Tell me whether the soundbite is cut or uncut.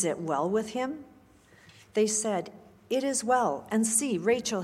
uncut